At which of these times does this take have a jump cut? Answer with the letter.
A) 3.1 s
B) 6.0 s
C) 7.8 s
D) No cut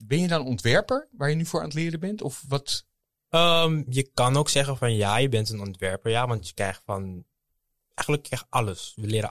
D